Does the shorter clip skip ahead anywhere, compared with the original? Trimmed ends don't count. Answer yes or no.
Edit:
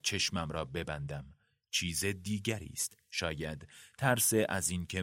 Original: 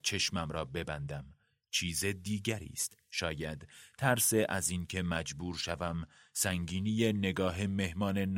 no